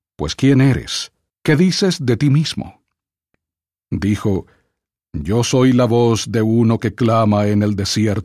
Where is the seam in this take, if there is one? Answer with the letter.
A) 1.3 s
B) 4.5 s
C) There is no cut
A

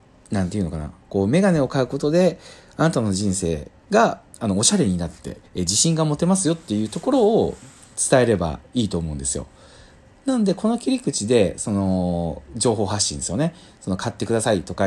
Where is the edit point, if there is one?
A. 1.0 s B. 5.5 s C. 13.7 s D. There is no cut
B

